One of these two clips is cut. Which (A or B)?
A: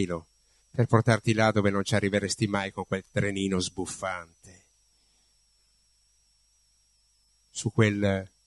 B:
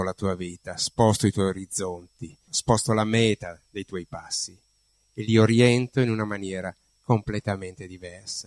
B